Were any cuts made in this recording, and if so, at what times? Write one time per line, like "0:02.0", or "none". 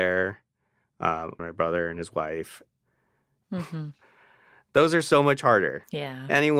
0:01.4
0:03.4